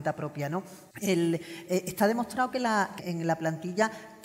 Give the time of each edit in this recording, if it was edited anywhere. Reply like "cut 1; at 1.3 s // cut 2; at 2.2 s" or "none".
cut 1; at 0.9 s // cut 2; at 3.0 s

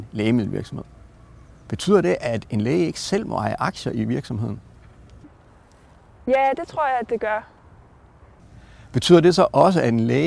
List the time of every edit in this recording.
none

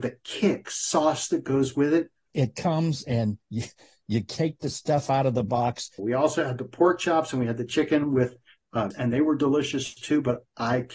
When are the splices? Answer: cut 1; at 2.3 s // cut 2; at 6.0 s // cut 3; at 8.9 s

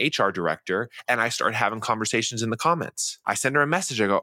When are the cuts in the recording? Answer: cut 1; at 3.2 s

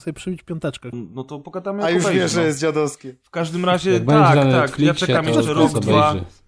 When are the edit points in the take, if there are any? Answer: cut 1; at 0.9 s

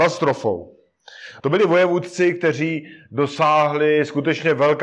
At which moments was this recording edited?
cut 1; at 1.4 s

